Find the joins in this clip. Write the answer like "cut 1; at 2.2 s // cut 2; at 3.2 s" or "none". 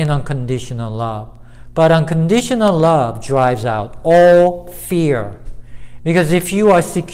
cut 1; at 6.0 s